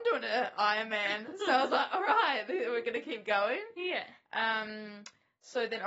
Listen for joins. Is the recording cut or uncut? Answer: uncut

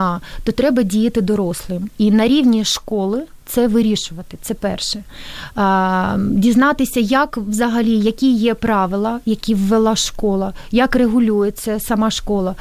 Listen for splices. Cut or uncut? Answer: uncut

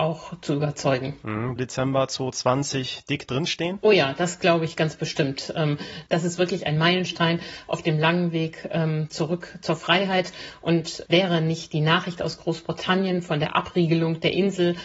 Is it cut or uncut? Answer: cut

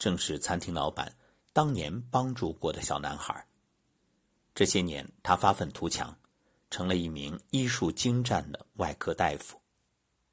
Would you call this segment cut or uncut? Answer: uncut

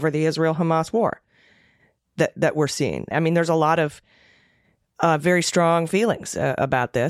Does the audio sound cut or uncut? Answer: cut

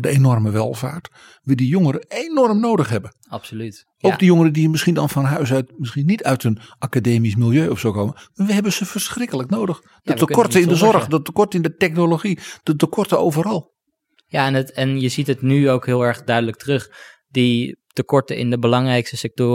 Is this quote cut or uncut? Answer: uncut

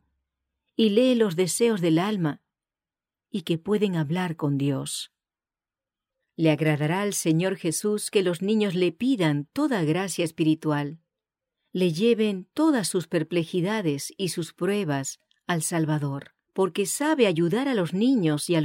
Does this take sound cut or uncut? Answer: cut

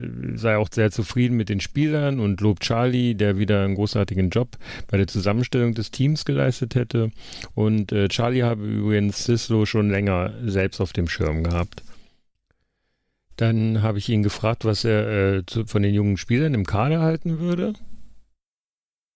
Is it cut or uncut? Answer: uncut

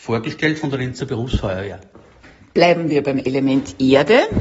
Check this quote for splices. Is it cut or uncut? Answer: uncut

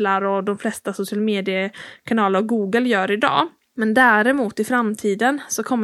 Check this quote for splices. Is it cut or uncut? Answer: uncut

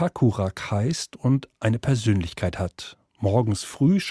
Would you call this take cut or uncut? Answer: uncut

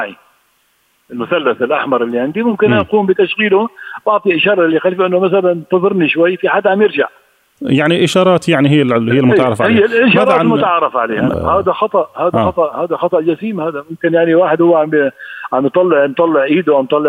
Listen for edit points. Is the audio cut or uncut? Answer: cut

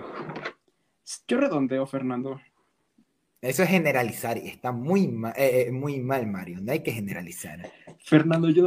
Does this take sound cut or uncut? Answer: uncut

